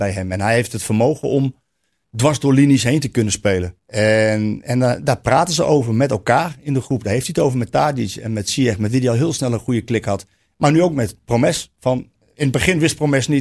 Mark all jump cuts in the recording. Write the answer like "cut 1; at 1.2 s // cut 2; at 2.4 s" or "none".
cut 1; at 3.8 s